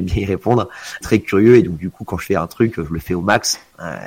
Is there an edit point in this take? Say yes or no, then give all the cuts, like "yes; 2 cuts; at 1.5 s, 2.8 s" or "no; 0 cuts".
yes; 1 cut; at 1.0 s